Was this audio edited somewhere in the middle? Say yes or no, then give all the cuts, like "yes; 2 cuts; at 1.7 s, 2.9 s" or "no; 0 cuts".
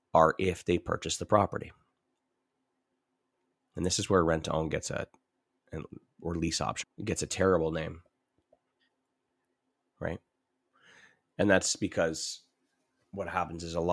yes; 1 cut; at 6.8 s